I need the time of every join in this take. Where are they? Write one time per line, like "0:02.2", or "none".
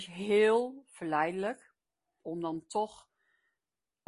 0:02.2